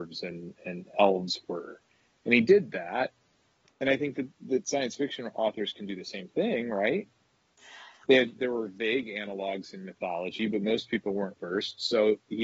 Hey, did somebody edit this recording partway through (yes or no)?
yes